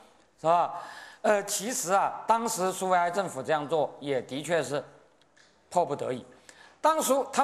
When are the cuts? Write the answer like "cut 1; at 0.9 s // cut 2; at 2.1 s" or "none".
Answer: none